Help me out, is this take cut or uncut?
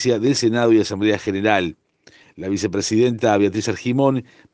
uncut